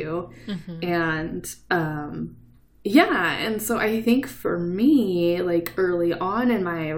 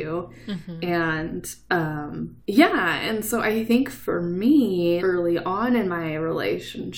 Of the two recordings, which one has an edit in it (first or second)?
second